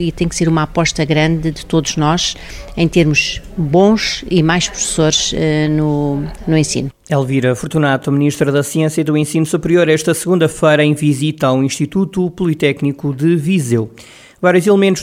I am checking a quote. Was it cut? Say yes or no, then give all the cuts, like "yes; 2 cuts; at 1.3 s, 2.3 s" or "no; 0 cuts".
no; 0 cuts